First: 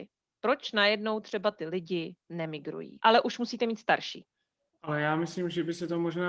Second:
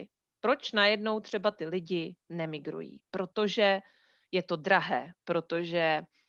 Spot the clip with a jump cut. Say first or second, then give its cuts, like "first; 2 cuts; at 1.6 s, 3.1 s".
first; 2 cuts; at 3.0 s, 4.7 s